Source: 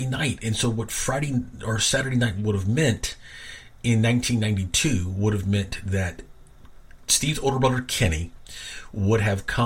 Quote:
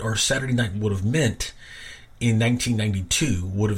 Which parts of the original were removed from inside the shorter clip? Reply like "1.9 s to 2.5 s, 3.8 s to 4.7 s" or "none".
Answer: none